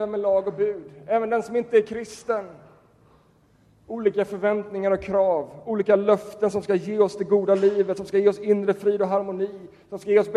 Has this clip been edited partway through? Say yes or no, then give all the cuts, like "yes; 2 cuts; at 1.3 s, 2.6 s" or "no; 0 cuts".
no; 0 cuts